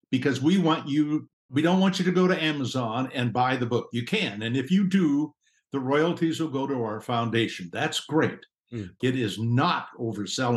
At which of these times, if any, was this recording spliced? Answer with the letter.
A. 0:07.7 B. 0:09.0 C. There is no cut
B